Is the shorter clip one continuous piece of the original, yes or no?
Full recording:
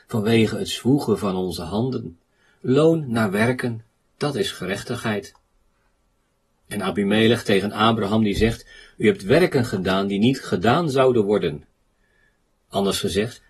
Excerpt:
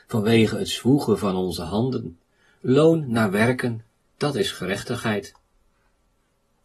yes